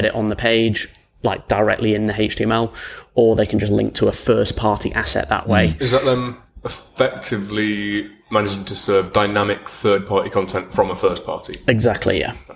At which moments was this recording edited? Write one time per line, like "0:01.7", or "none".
none